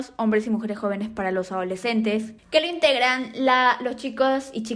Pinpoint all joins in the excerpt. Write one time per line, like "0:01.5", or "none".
0:02.4